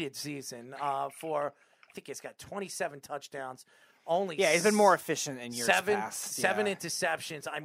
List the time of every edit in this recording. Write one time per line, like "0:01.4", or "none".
0:01.9